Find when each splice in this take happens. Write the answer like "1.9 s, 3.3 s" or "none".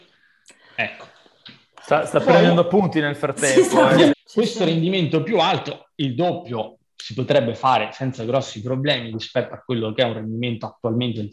4.1 s, 9.1 s